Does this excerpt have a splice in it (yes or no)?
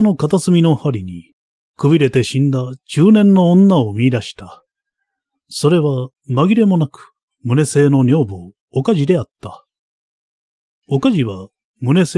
no